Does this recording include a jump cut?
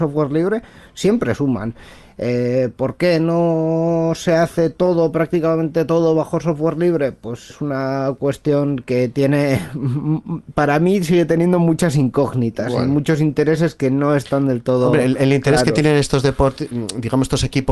yes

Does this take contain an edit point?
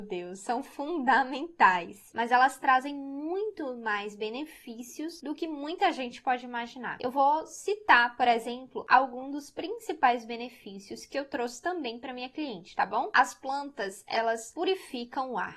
yes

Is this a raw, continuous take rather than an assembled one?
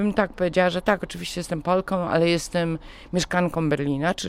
yes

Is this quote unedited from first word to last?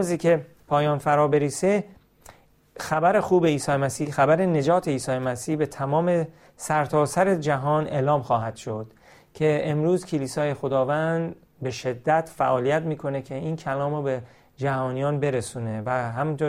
yes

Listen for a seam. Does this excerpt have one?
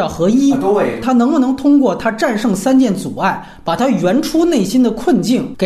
yes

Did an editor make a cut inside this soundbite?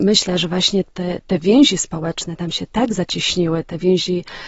no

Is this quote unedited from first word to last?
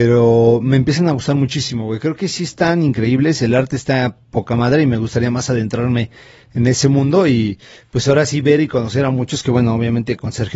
yes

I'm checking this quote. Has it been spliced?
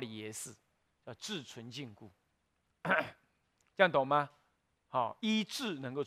no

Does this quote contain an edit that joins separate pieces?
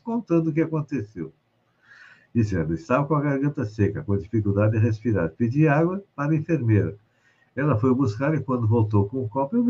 no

